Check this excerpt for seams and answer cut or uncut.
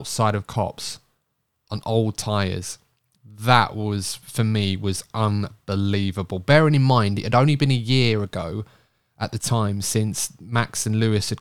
uncut